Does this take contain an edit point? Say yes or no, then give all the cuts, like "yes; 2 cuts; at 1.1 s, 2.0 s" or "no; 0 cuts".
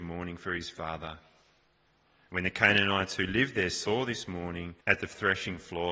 yes; 1 cut; at 4.8 s